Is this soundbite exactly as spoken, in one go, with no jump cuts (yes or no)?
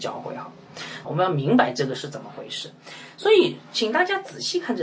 no